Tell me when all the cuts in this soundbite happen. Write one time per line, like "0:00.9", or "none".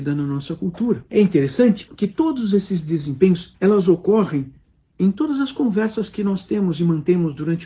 0:03.5